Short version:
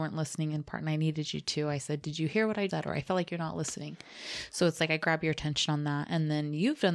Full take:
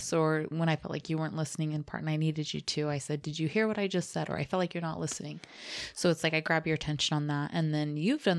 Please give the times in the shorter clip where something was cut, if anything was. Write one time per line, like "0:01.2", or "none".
0:02.7

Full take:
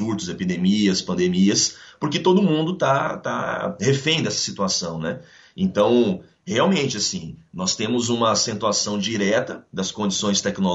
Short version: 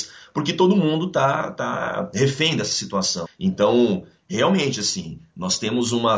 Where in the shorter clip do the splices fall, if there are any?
0:03.2

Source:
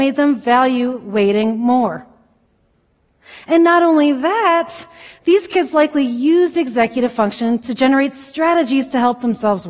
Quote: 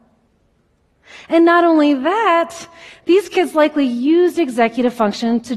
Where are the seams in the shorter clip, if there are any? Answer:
none

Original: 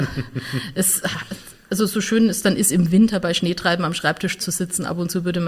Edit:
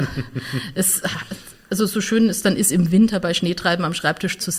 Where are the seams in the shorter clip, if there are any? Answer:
none

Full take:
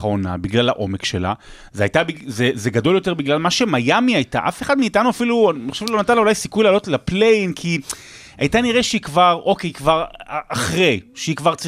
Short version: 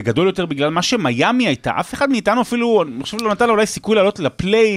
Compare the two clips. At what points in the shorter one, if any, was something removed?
none

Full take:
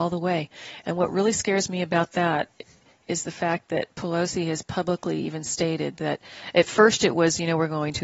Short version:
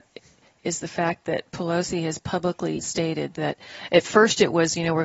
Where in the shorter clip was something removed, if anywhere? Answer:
0:02.8

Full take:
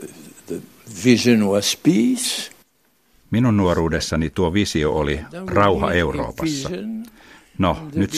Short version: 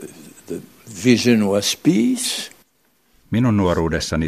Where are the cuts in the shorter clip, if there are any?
none

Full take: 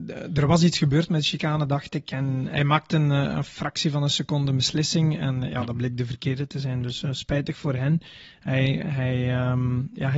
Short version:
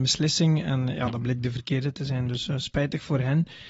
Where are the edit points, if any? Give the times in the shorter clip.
none

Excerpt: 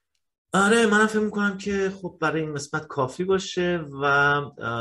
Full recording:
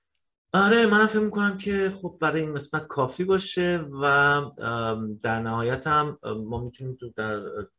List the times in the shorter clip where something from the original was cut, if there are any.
none

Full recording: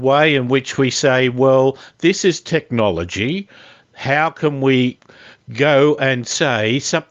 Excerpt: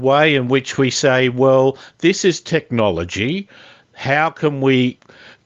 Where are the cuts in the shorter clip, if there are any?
none

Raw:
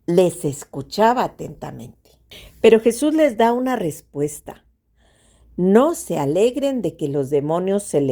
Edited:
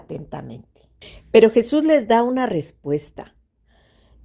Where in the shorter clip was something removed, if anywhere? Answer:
none

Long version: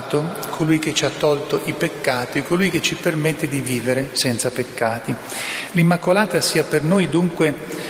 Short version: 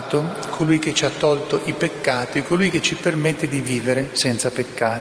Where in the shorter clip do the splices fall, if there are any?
none

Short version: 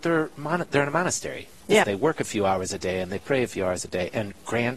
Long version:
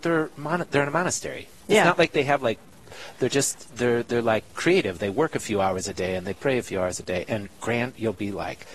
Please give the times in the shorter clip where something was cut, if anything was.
0:01.8

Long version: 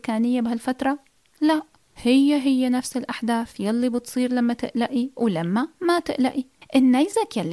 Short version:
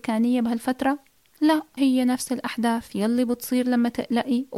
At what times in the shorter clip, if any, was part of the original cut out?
0:01.8

